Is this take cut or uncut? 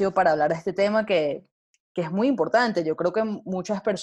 uncut